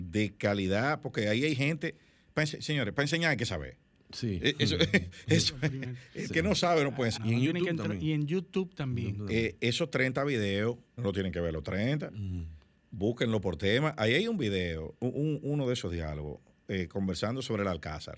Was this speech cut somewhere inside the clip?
yes; 2 cuts; at 7.2 s, 11.0 s

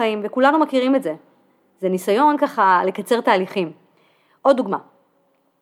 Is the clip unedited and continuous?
yes; 0 cuts

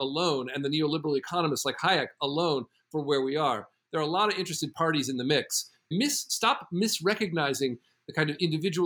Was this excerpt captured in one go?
no; 1 cut; at 5.9 s

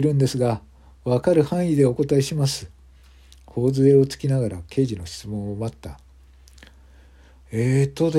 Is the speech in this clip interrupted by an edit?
no; 0 cuts

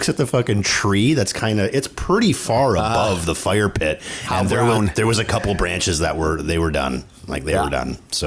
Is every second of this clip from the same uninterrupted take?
yes; 0 cuts

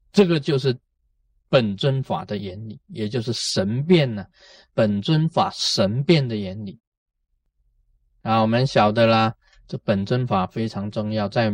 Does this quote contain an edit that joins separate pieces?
no; 0 cuts

